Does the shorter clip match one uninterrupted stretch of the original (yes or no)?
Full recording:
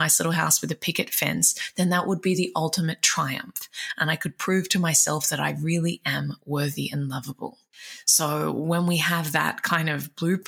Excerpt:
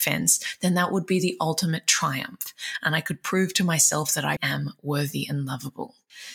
no